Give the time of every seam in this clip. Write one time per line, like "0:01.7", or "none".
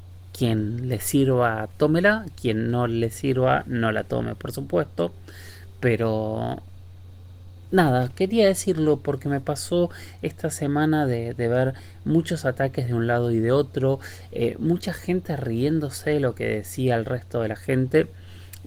none

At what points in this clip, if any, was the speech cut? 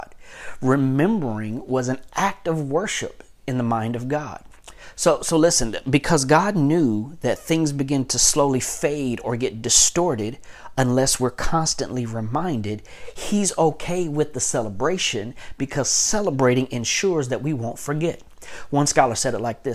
none

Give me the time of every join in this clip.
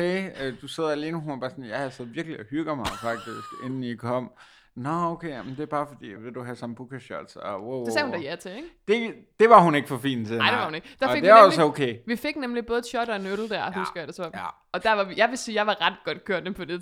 0:06.2

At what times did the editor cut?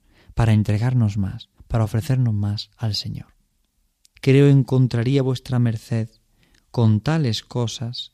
0:01.6
0:04.1

